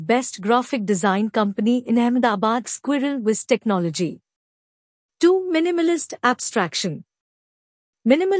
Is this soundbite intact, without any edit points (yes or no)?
no